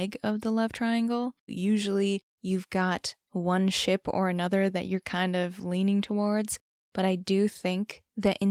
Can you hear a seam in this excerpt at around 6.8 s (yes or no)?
no